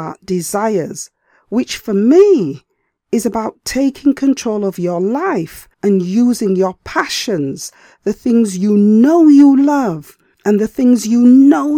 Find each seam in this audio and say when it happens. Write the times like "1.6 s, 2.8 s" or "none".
5.7 s